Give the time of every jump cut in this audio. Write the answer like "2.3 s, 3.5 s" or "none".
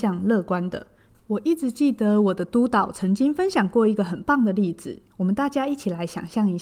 1.1 s, 5.1 s